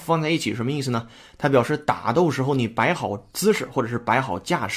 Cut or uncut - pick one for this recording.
uncut